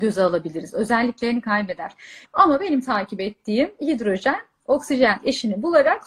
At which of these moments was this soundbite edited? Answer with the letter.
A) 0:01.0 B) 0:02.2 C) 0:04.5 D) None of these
B